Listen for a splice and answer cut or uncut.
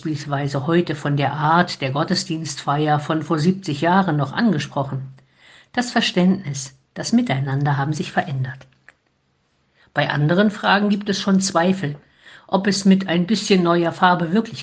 uncut